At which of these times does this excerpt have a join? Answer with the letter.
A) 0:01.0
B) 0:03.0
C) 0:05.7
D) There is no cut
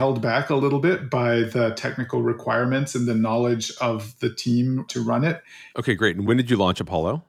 C